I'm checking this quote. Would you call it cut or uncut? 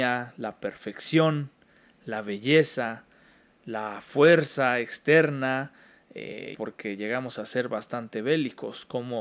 cut